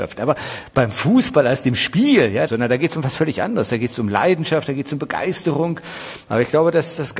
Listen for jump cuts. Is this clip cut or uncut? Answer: cut